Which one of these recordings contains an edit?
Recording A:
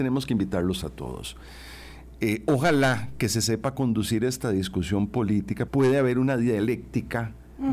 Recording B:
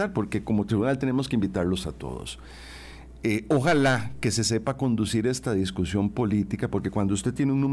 A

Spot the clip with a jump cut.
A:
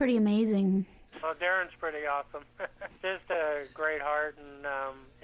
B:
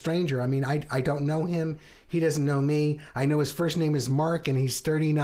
A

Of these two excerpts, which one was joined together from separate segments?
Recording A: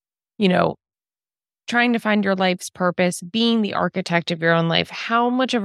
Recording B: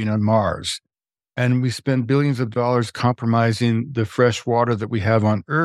B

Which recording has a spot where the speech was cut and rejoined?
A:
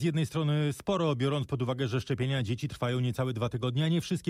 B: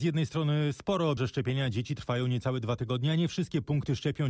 B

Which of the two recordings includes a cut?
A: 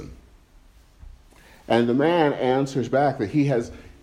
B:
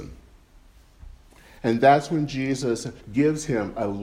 B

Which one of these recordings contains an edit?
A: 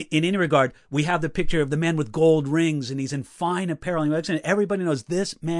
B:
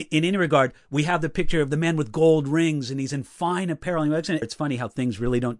B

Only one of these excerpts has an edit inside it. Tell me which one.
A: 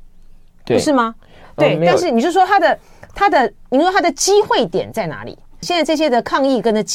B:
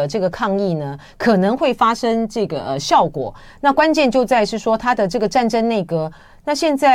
A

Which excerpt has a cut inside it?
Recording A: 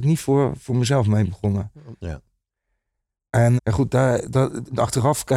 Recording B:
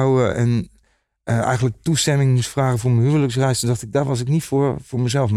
A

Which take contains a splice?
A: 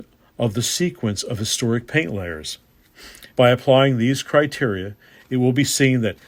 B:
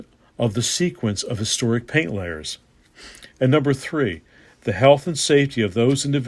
A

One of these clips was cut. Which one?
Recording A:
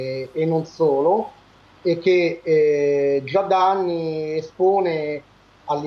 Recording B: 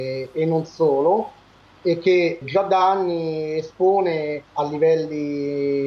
B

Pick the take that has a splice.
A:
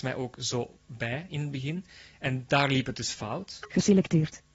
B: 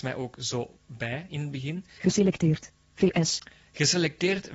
B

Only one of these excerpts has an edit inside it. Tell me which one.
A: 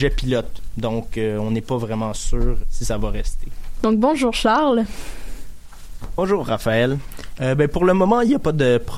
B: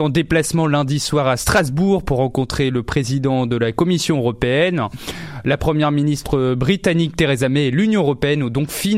A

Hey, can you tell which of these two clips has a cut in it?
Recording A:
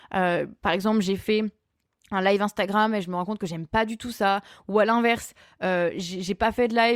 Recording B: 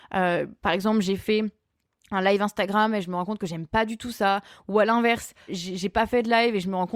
B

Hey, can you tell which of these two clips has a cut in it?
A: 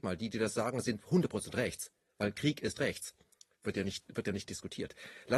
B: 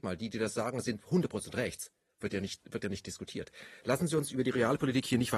B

